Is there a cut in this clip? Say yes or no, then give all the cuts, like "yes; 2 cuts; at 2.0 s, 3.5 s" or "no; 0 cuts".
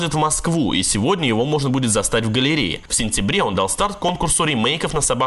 yes; 1 cut; at 2.9 s